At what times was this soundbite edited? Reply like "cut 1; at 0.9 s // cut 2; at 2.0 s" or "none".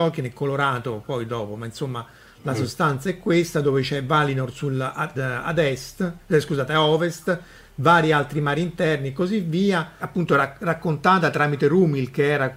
cut 1; at 5.1 s // cut 2; at 10.0 s